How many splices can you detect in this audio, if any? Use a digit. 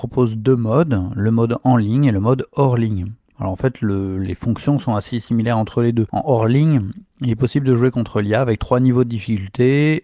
0